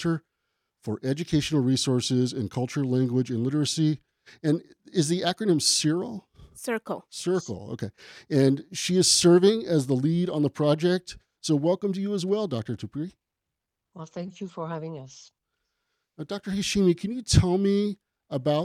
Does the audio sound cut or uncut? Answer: uncut